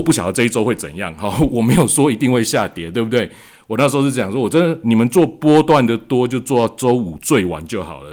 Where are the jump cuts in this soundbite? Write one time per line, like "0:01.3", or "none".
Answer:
none